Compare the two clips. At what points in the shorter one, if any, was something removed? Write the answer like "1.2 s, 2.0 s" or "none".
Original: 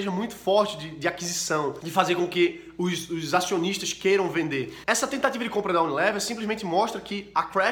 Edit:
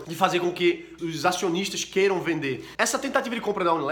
1.0 s